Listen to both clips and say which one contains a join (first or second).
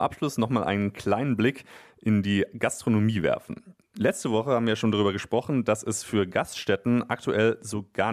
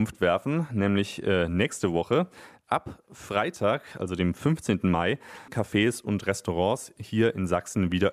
second